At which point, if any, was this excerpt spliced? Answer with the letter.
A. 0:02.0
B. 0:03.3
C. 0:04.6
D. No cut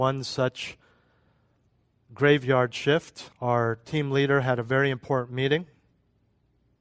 B